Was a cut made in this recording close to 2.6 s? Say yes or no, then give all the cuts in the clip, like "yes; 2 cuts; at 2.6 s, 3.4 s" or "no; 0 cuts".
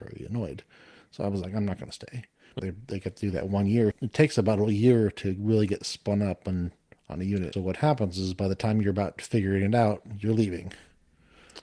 yes; 3 cuts; at 2.6 s, 3.9 s, 7.5 s